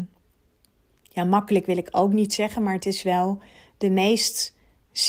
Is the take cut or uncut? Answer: uncut